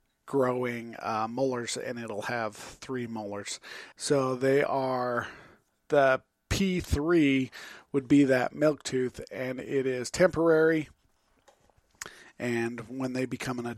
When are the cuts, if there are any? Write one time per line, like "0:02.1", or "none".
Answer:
0:03.9